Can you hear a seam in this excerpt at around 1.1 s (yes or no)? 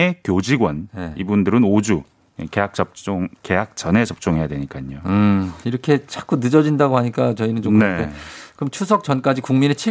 no